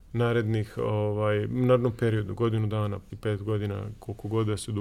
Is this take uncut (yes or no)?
no